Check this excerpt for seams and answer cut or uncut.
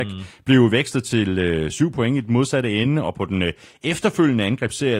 uncut